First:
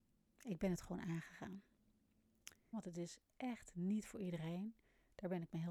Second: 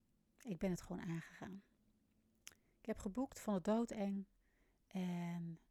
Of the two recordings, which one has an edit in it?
first; 1 cut; at 2.7 s

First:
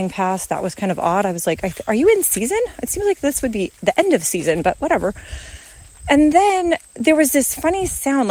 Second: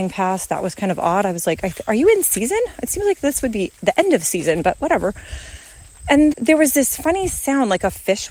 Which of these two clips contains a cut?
second; 1 cut; at 6.3 s

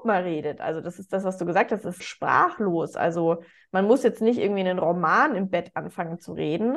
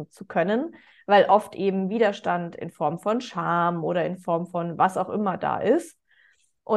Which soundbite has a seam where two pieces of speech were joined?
first; 1 cut; at 2.0 s

